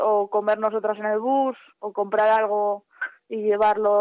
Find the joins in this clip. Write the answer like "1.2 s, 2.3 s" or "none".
1.7 s